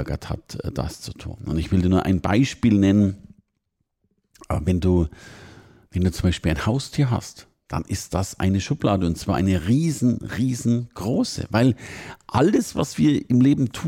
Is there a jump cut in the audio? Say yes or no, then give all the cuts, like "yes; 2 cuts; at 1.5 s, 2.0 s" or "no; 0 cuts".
no; 0 cuts